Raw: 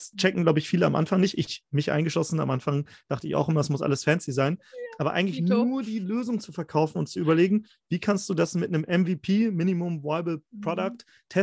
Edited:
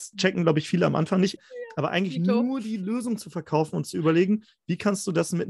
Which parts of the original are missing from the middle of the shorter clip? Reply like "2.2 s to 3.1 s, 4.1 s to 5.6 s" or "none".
1.4 s to 4.6 s